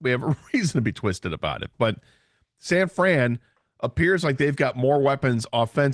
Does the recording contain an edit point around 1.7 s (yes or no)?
no